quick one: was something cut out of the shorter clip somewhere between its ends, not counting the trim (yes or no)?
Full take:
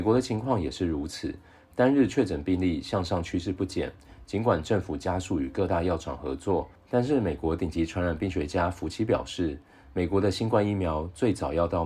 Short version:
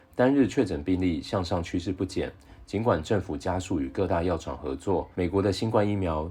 yes